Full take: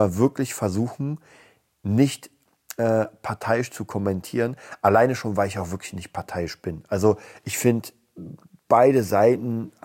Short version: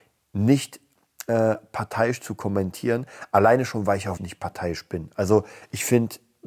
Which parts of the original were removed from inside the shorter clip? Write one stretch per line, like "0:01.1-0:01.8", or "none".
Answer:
0:05.7-0:05.9